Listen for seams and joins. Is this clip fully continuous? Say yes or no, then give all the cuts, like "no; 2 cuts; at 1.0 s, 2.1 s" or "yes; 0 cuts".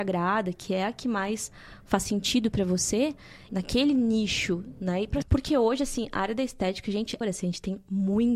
no; 3 cuts; at 3.5 s, 5.2 s, 7.2 s